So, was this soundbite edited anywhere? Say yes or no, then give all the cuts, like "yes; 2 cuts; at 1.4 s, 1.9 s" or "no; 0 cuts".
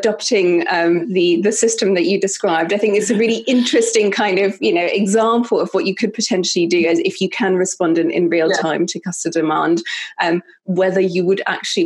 no; 0 cuts